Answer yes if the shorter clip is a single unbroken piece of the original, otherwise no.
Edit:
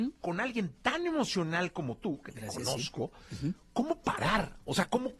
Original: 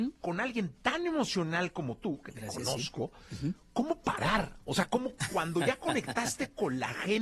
yes